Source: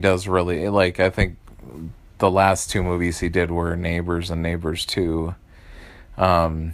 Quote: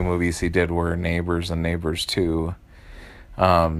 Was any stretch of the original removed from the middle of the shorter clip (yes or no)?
no